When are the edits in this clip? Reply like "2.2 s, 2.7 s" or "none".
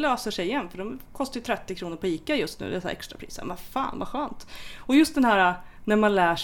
none